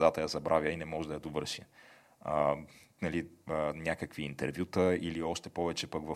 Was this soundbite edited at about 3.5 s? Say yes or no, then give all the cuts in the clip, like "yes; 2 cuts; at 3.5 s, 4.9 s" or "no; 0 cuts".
yes; 2 cuts; at 2.1 s, 3.5 s